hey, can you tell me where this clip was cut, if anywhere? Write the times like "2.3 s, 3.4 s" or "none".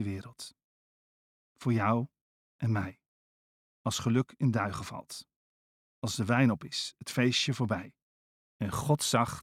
8.5 s